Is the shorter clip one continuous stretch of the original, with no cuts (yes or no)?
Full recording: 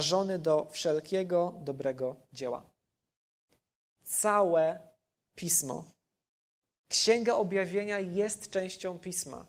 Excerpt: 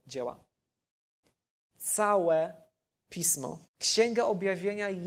no